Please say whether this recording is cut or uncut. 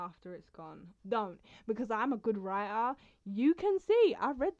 cut